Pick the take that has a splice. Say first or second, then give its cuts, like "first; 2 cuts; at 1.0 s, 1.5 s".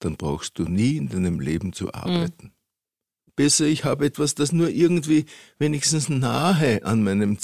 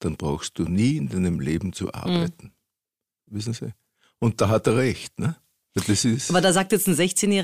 first; 1 cut; at 3.3 s